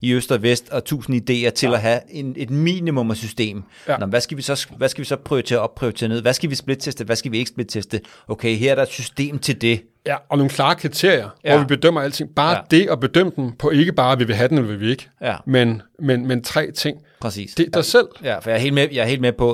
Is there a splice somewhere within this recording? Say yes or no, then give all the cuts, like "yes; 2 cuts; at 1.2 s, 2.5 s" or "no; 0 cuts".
yes; 1 cut; at 17.7 s